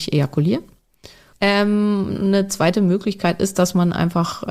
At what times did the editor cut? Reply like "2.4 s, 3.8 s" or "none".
1.3 s